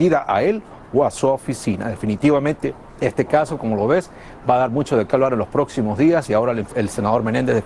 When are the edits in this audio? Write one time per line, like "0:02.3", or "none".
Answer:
0:06.7